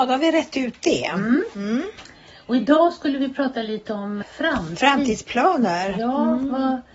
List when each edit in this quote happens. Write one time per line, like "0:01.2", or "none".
0:04.2

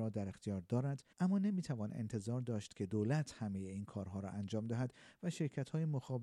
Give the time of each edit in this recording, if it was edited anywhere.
0:01.1

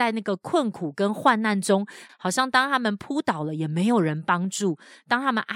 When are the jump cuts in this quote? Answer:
0:02.1

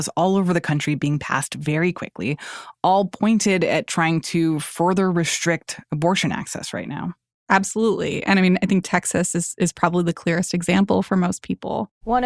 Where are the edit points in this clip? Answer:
none

